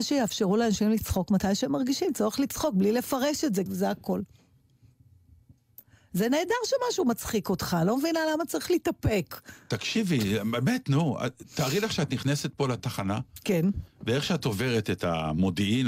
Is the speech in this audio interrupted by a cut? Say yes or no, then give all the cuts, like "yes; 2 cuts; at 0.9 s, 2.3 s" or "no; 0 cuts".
yes; 1 cut; at 3.7 s